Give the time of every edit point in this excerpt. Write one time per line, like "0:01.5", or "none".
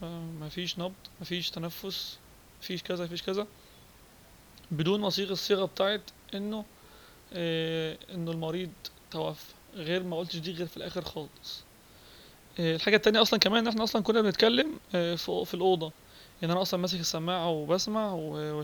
0:01.1